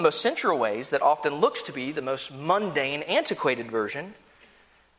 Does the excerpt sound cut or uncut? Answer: uncut